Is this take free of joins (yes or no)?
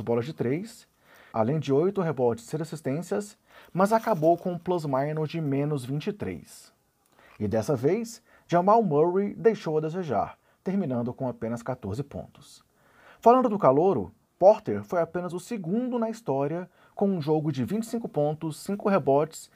no